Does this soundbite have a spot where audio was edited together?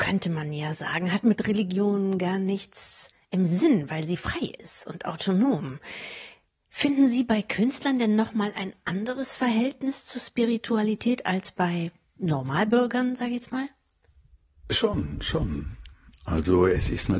no; 0 cuts

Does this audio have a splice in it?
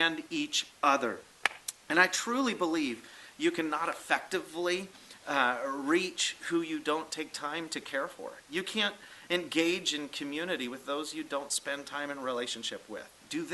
no; 0 cuts

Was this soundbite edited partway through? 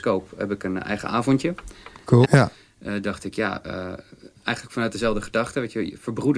yes; 1 cut; at 2.2 s

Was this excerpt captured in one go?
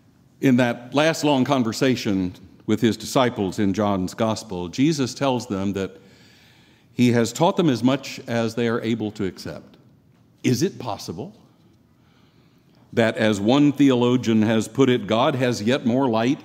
no; 1 cut; at 10.3 s

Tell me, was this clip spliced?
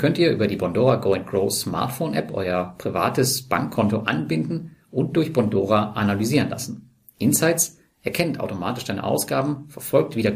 no; 0 cuts

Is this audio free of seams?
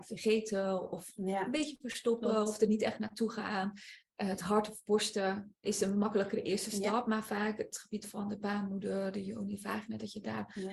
yes; 0 cuts

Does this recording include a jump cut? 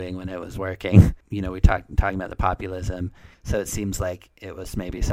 yes; 2 cuts; at 1.2 s, 3.3 s

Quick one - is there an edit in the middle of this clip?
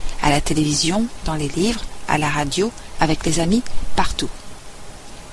no; 0 cuts

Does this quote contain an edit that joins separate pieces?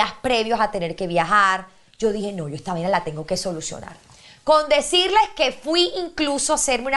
no; 0 cuts

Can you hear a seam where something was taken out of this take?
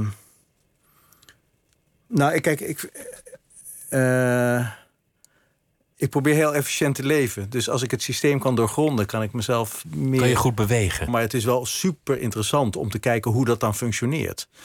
yes; 1 cut; at 11.1 s

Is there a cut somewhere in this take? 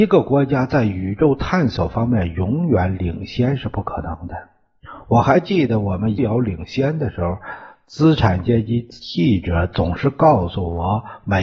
yes; 1 cut; at 6.2 s

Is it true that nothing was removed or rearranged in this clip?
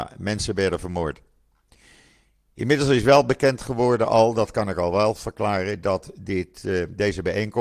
yes; 0 cuts

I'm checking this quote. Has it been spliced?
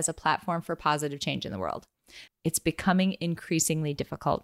yes; 1 cut; at 2.3 s

